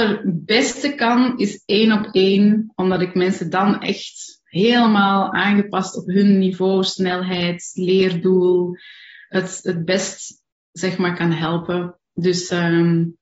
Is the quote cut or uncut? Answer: uncut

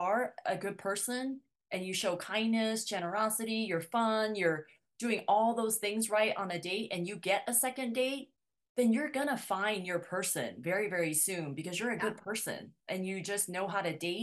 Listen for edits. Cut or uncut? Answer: uncut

